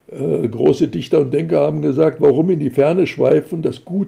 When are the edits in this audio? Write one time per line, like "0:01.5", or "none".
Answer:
none